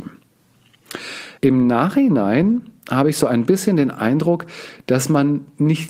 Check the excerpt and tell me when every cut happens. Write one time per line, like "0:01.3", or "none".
0:01.4